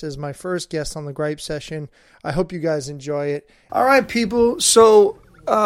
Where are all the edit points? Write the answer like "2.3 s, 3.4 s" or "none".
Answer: 3.7 s